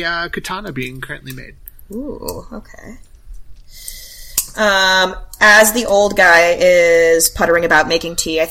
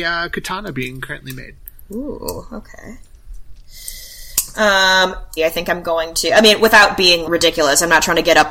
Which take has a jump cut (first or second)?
second